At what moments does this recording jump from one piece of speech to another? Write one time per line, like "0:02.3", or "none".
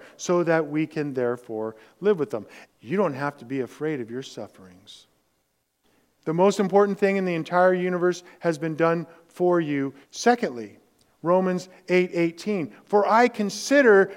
0:02.6
0:06.2
0:10.0